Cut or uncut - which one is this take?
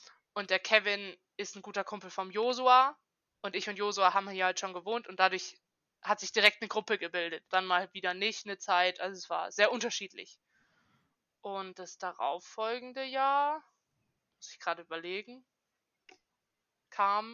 cut